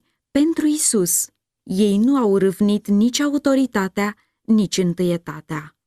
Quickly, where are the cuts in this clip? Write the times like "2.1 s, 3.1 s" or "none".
1.6 s